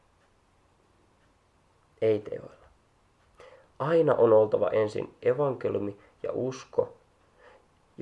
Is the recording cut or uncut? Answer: uncut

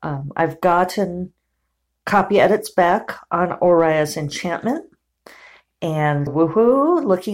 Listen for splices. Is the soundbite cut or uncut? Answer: cut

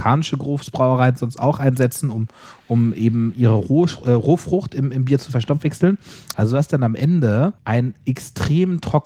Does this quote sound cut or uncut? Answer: cut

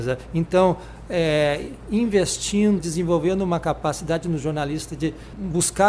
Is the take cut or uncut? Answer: cut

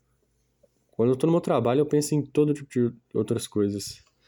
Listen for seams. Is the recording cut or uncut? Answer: uncut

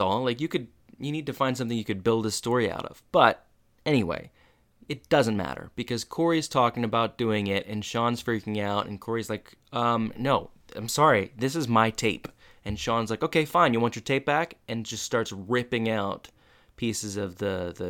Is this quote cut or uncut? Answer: uncut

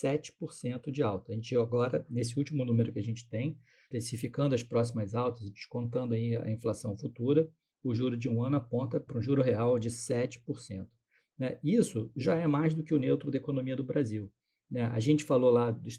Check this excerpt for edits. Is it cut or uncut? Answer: uncut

